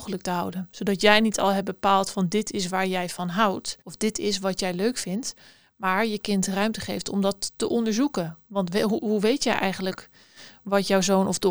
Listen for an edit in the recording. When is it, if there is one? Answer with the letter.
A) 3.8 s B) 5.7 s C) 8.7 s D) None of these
A